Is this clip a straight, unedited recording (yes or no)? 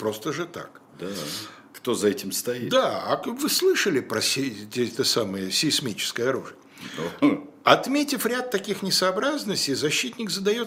yes